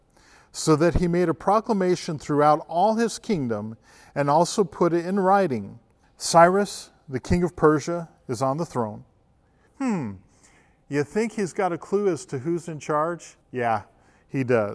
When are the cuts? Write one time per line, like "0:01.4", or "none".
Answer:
0:06.0
0:09.7
0:13.4